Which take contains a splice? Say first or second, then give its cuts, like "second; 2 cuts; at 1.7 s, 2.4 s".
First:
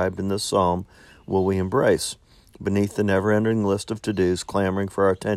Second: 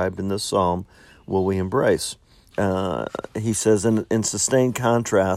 second; 1 cut; at 2.5 s